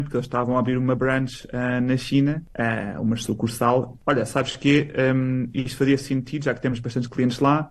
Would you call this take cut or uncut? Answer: cut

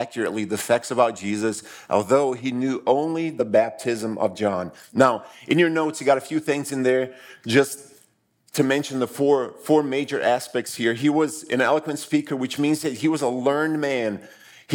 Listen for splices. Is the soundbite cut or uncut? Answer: uncut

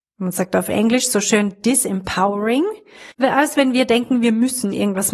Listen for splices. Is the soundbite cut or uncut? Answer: cut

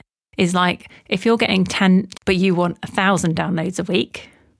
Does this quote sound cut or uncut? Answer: cut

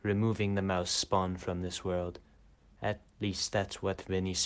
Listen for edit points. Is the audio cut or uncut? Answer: uncut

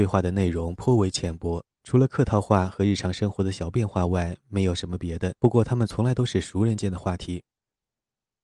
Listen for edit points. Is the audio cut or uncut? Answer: cut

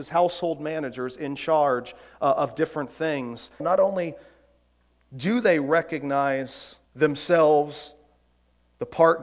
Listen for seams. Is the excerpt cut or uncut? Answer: cut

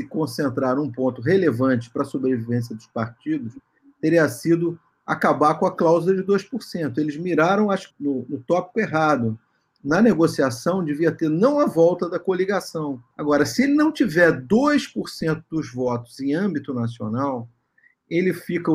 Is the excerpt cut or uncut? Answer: cut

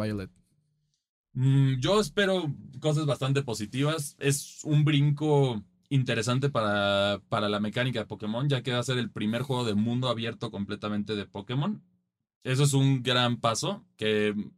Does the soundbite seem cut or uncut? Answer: uncut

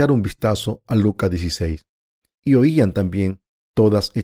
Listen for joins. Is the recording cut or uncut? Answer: cut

